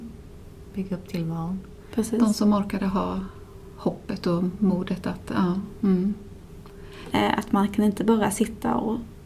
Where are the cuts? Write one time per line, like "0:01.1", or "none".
0:07.1